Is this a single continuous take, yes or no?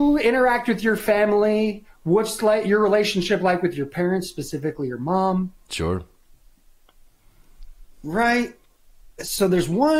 yes